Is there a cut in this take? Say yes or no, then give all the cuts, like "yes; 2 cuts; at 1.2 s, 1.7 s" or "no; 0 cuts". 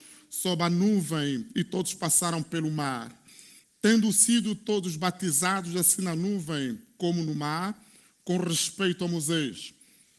no; 0 cuts